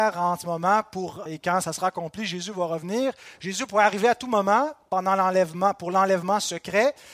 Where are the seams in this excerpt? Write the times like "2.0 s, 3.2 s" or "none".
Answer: 1.3 s